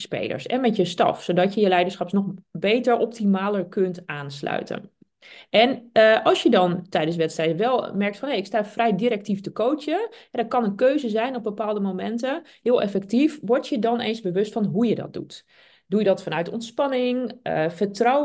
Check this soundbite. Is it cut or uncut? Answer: uncut